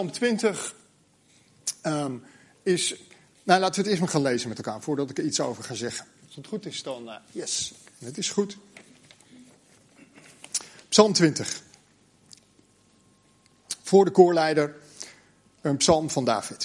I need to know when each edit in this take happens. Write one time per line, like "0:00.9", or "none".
none